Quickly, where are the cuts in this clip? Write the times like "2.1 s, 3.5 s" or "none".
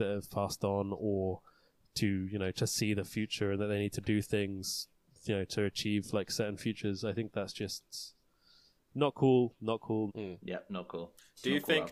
10.1 s